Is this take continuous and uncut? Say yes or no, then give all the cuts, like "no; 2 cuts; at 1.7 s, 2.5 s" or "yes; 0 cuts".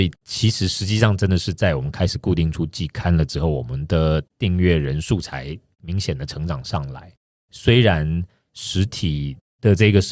yes; 0 cuts